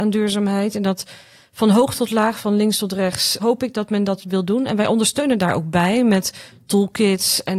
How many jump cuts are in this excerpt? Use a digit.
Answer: 1